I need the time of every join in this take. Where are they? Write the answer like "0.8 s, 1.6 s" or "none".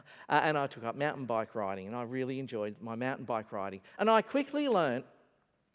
3.9 s

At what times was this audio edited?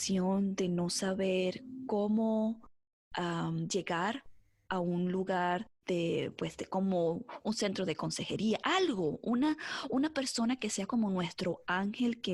none

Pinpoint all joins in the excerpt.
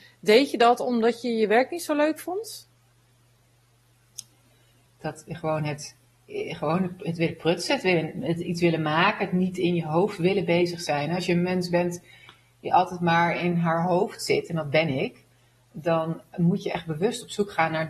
4.9 s

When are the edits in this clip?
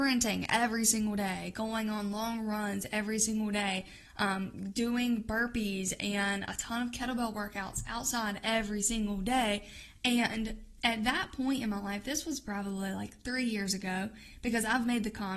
none

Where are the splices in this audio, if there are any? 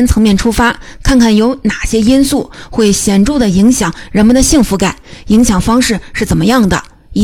none

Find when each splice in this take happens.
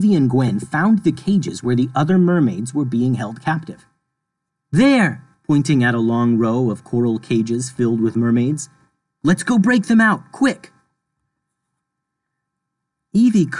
5.3 s

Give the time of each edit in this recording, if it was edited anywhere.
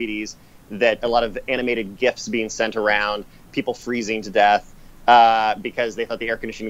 1.0 s, 3.5 s

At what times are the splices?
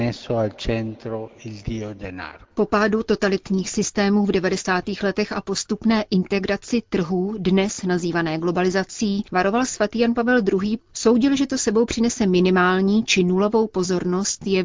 2.4 s, 10.8 s

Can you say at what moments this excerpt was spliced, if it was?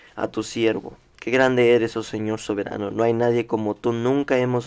none

